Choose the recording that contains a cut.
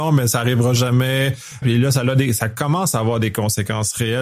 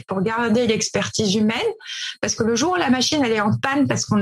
first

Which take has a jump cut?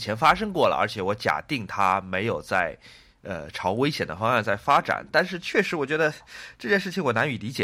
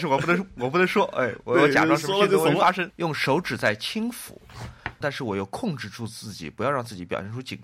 second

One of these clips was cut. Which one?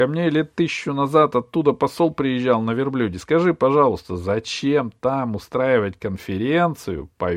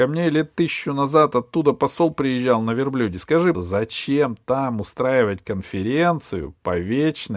second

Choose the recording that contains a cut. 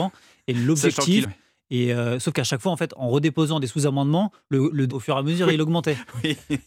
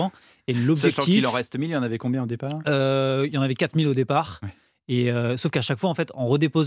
first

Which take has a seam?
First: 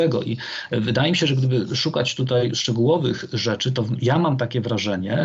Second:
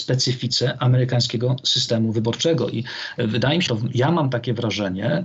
second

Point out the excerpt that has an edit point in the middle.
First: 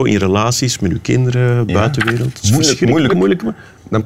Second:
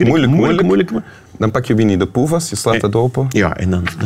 first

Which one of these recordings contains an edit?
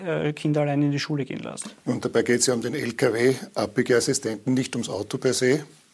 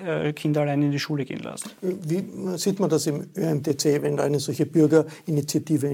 first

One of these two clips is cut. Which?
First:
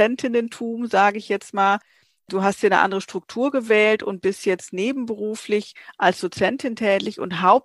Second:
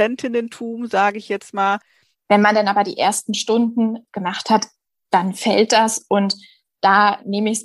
second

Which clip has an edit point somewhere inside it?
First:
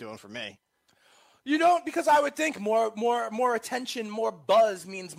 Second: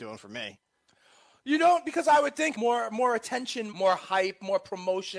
second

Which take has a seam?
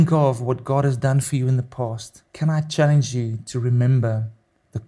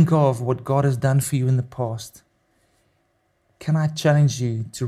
first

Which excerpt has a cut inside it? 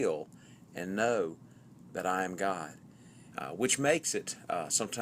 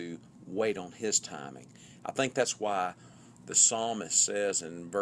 first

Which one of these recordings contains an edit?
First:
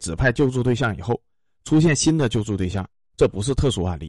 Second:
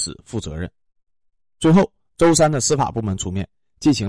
second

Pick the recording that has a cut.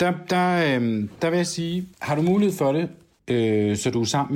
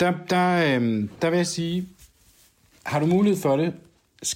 first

